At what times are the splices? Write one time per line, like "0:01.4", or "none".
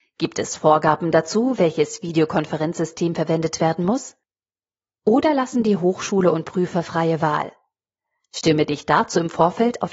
none